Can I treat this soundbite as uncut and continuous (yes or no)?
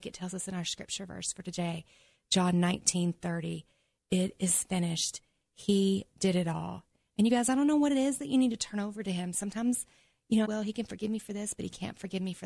no